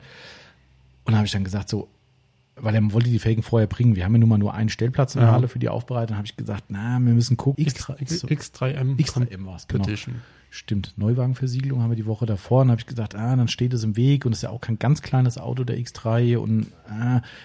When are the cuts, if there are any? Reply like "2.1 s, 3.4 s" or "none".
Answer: 7.5 s